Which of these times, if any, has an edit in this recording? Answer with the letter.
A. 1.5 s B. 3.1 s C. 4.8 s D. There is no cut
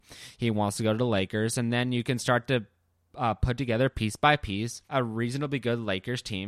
C